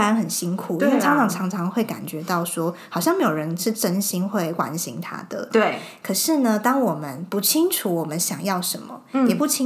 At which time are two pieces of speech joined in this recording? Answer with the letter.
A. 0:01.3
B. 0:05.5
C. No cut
B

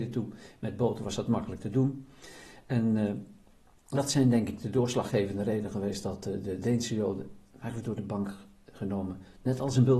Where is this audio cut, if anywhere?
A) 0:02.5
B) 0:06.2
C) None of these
C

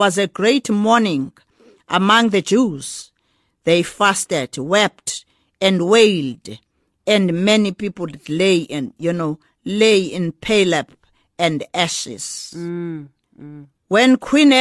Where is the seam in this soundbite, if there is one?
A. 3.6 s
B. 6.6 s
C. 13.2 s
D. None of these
C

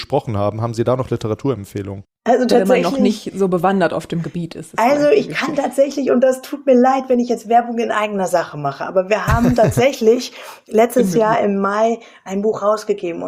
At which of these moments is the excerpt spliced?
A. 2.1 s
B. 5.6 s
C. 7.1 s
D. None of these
D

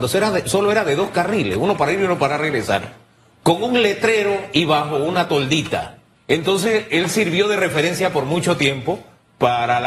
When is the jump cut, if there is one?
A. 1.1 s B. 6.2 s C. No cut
B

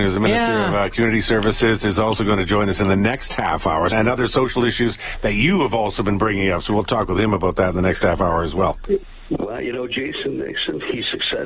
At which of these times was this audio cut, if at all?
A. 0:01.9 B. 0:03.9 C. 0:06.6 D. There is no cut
B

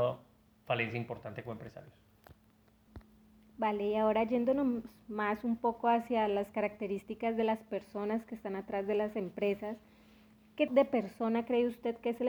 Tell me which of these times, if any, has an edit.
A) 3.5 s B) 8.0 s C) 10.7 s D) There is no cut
C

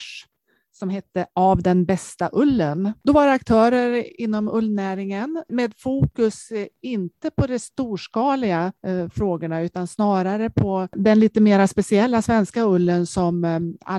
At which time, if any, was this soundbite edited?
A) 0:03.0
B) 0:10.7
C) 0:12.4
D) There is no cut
D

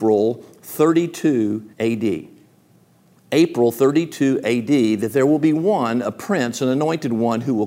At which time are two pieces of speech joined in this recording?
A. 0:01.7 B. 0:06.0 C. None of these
A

